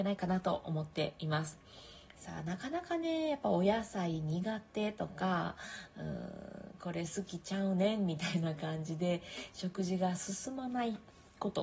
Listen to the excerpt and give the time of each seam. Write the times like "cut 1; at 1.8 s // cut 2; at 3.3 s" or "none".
cut 1; at 2.1 s